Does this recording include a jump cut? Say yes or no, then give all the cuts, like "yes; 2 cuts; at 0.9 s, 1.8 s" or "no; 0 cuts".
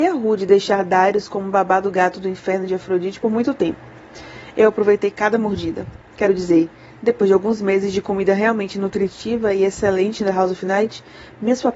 no; 0 cuts